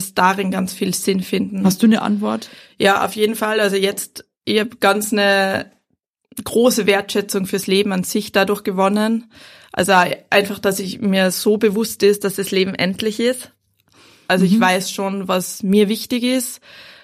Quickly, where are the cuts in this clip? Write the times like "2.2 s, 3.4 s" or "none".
14.3 s